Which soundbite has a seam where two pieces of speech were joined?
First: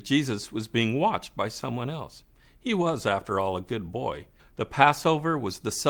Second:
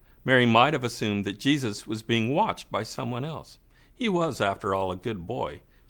first; 1 cut; at 4.4 s

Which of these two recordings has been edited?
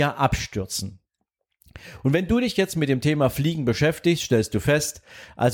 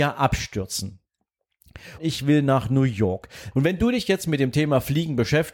second; 2 cuts; at 2.0 s, 3.5 s

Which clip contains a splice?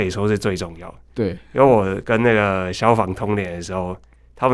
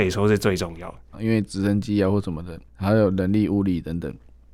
second; 2 cuts; at 1.1 s, 2.7 s

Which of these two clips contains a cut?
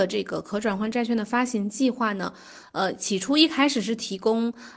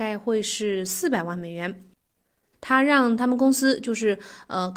second; 1 cut; at 2.5 s

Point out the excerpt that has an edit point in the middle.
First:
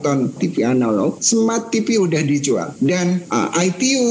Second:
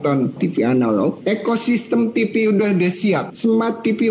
first; 1 cut; at 1.2 s

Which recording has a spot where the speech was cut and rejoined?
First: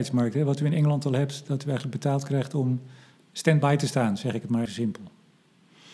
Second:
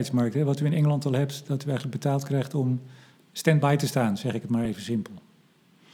first; 1 cut; at 4.7 s

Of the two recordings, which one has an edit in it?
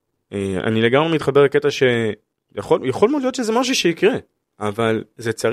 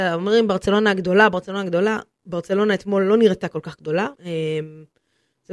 second; 1 cut; at 4.2 s

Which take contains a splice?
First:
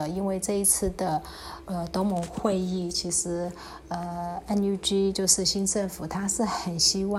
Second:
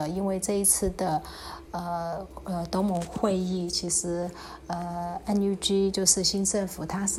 first; 1 cut; at 1.7 s

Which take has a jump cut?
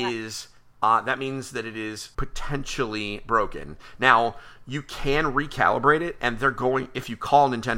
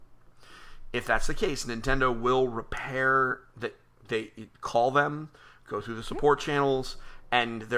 first; 1 cut; at 2.1 s

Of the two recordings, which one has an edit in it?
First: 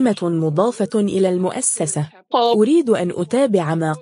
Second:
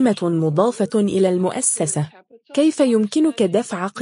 first; 1 cut; at 2.3 s

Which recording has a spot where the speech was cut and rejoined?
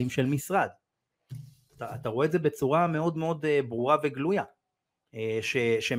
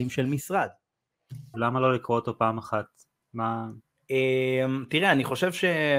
second; 1 cut; at 1.5 s

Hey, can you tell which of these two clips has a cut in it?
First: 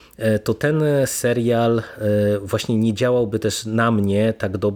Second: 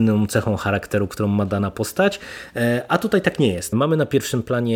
second; 1 cut; at 3.7 s

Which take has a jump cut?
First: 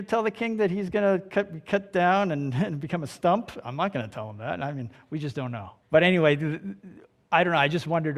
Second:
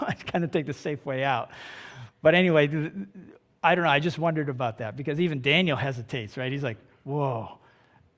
first; 1 cut; at 5.8 s

